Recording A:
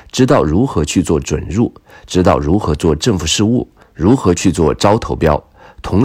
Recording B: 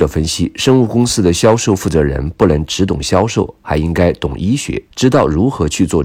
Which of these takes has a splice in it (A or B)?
B